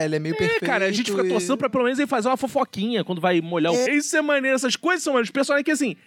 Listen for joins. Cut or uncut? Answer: cut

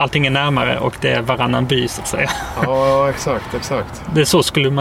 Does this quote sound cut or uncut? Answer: uncut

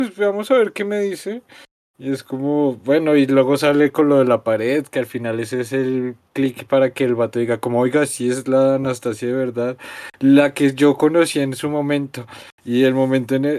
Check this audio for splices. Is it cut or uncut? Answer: cut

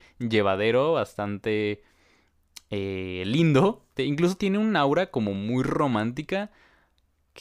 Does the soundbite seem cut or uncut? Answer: cut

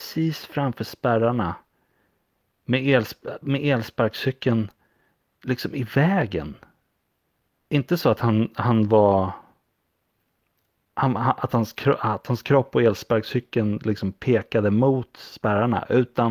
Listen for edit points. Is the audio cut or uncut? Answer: uncut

